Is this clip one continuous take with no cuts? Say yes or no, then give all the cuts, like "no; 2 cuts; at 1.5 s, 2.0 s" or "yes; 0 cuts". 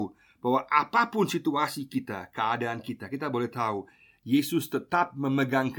yes; 0 cuts